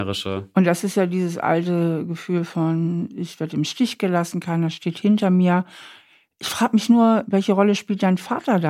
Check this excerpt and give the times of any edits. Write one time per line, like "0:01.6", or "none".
none